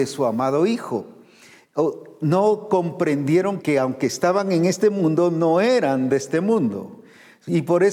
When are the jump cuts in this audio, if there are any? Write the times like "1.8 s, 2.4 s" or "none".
3.6 s